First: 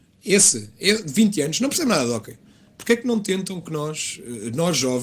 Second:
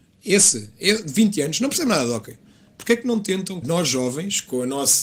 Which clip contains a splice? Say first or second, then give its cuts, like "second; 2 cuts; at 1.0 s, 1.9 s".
second; 1 cut; at 3.6 s